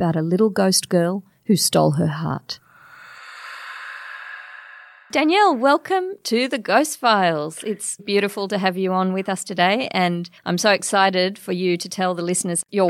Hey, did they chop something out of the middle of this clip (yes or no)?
yes